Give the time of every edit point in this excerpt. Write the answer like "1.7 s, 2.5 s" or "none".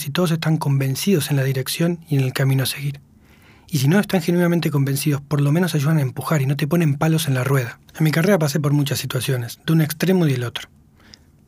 7.9 s